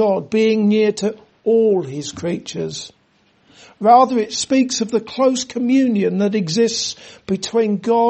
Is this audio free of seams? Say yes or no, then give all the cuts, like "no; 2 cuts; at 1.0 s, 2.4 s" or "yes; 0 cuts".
yes; 0 cuts